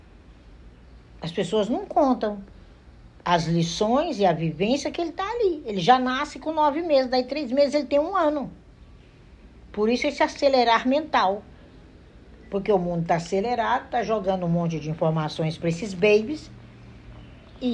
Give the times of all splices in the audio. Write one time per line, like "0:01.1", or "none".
none